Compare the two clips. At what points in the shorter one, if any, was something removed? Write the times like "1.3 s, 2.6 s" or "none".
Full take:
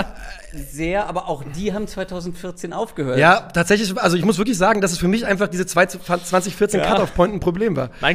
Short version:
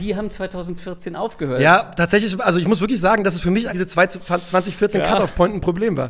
3.7 s